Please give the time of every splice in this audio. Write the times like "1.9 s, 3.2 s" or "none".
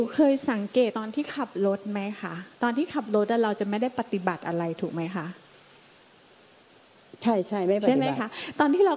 0.9 s, 2.5 s